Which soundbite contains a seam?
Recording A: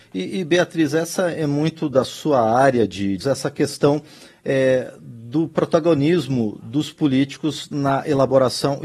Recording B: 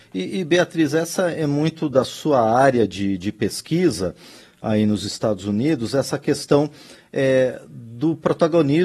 A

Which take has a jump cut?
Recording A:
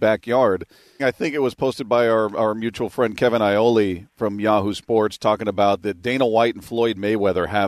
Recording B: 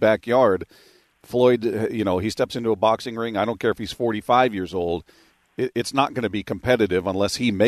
A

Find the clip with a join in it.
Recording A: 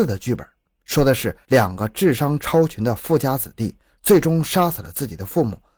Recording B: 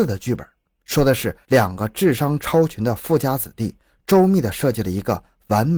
A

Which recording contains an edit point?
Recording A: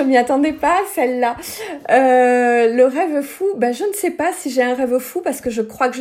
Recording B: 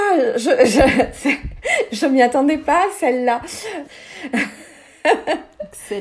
B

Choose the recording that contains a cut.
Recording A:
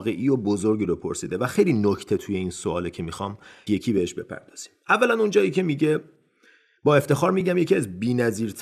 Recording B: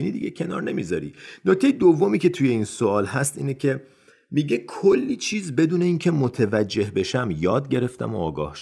A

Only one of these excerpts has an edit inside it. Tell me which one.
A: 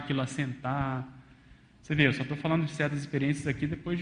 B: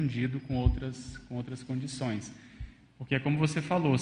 B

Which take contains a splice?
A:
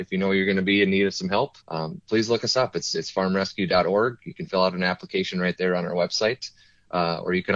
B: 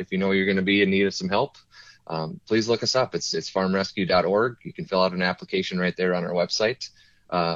A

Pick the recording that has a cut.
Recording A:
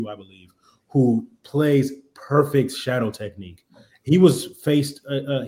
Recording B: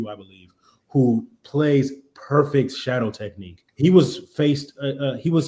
B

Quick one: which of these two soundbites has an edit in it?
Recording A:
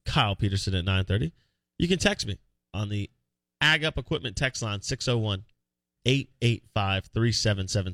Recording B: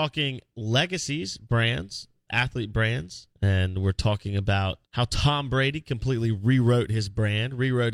B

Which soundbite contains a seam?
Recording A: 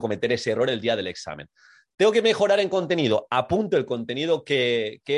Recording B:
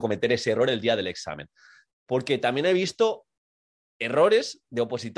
B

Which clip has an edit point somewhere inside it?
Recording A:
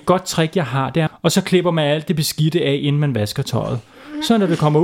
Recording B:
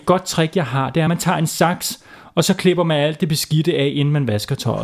A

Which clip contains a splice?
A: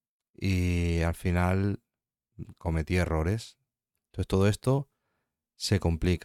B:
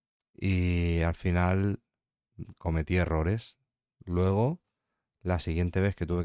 A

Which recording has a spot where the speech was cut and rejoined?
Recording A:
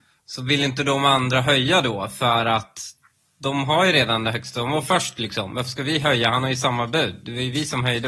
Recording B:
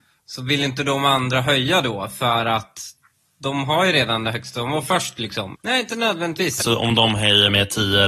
B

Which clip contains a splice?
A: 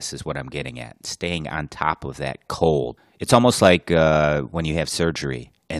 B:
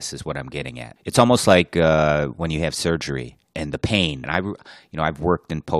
B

